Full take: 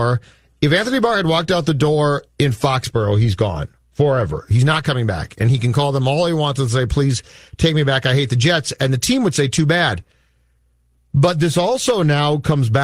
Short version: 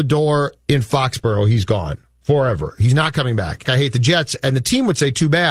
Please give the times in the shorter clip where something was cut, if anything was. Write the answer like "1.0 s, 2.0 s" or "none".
3.6 s